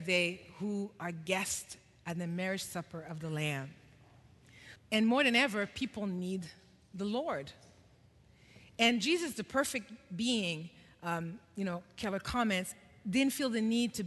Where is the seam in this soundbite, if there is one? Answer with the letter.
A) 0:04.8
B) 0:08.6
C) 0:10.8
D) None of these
A